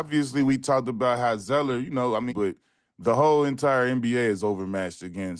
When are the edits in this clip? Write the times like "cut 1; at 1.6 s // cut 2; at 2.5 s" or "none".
cut 1; at 2.3 s